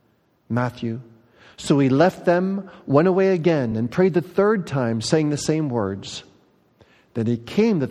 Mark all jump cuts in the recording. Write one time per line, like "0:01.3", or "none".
none